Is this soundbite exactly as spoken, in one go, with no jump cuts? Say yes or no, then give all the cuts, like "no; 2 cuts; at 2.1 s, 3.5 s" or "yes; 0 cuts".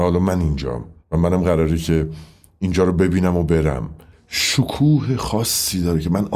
no; 1 cut; at 1.0 s